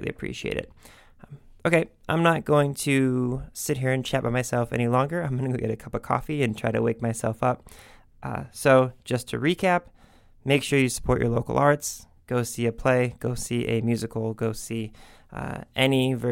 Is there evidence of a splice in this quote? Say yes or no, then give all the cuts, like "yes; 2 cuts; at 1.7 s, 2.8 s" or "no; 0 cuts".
no; 0 cuts